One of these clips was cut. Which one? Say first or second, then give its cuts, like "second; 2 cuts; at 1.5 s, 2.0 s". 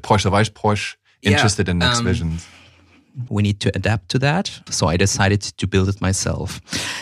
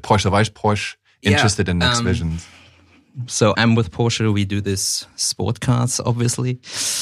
first; 2 cuts; at 3.3 s, 4.7 s